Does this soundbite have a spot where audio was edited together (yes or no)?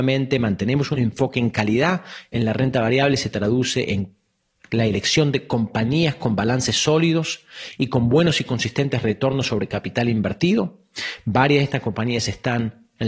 no